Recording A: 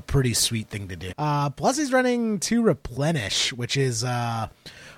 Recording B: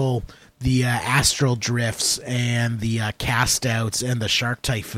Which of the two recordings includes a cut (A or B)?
A